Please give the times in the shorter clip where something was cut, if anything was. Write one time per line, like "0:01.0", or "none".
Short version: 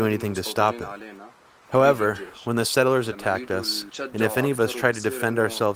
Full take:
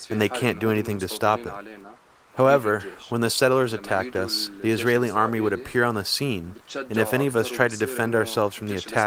0:03.9